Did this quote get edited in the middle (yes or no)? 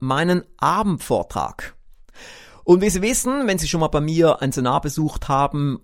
no